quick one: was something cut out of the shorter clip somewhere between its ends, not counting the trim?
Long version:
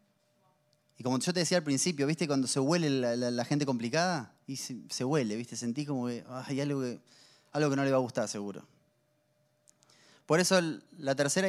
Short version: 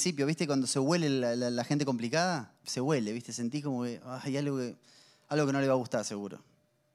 yes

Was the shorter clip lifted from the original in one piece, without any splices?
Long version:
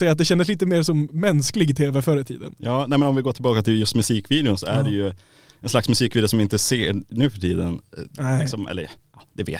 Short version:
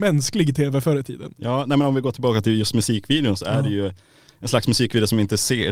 yes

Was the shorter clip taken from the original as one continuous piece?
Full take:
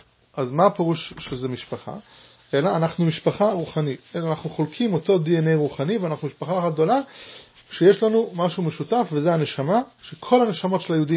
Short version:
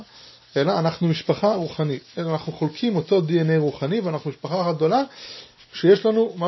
yes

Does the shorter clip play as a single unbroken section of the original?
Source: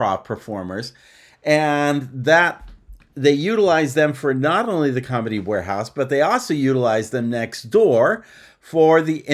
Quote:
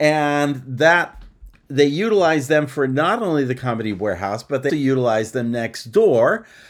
no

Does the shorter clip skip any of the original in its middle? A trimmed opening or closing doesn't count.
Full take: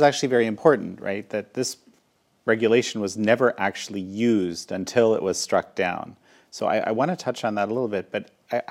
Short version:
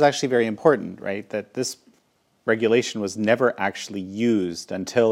no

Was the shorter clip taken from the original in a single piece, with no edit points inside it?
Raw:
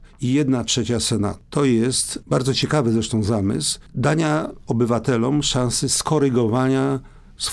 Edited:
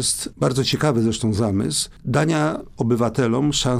yes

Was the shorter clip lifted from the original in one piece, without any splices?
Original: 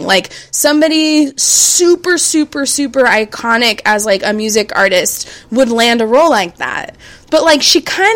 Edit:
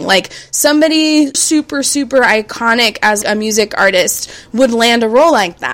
no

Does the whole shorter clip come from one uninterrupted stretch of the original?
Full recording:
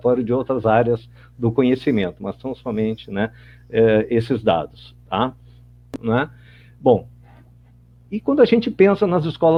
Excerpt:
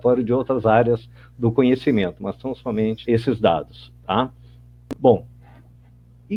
no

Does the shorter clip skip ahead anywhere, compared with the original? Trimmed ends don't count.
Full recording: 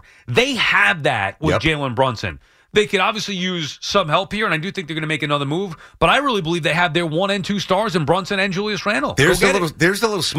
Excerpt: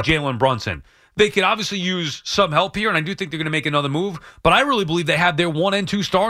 no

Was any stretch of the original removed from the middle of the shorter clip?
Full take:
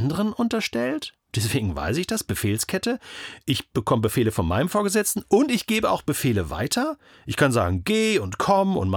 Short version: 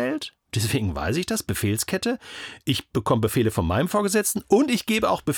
no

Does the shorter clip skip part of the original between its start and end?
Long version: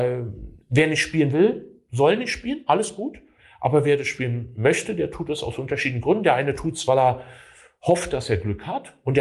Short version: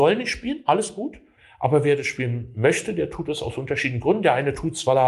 no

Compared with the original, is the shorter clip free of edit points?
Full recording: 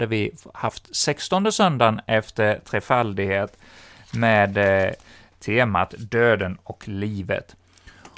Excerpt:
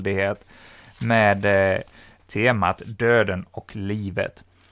yes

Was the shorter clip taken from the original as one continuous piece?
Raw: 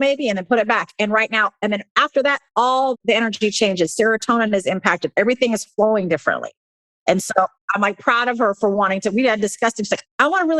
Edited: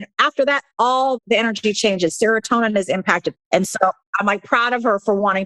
no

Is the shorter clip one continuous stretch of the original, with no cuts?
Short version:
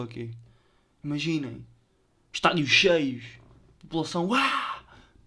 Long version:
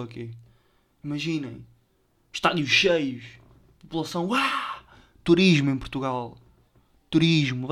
yes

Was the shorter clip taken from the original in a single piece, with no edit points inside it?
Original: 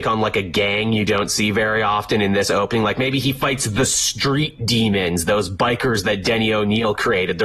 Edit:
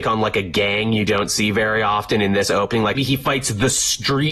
no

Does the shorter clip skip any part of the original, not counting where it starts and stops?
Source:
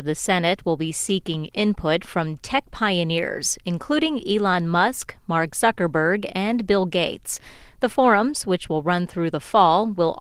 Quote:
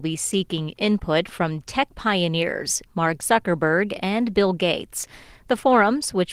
yes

